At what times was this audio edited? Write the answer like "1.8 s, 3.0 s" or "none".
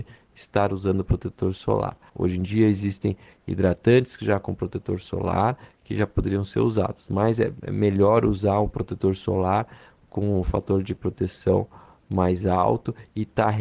2.1 s